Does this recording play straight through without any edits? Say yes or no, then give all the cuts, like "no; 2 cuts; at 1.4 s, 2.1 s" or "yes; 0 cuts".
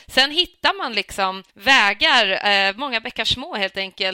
no; 1 cut; at 1.5 s